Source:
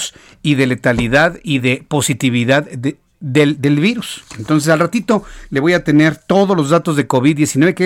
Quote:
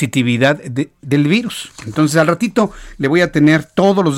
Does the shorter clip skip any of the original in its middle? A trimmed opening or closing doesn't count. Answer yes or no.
yes